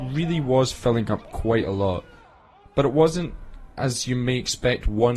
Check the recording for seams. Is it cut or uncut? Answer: uncut